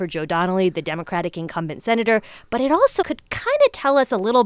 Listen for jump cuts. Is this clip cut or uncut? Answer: cut